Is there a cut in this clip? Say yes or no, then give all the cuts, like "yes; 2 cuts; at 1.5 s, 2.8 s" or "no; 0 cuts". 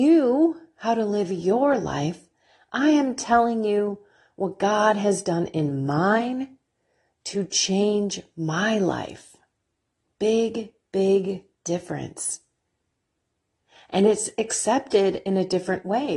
no; 0 cuts